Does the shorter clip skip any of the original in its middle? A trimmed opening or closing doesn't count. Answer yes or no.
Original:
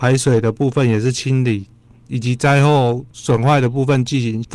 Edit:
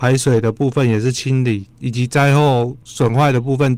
yes